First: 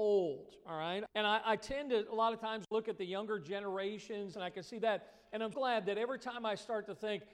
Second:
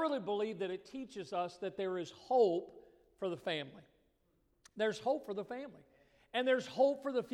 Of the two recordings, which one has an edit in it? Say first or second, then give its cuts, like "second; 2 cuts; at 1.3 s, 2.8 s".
first; 3 cuts; at 1.1 s, 4.3 s, 5.5 s